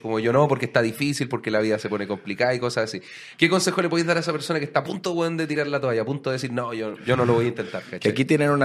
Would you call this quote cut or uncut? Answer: uncut